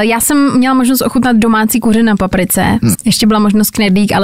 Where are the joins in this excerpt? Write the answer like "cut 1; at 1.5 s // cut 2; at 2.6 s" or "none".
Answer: cut 1; at 2.9 s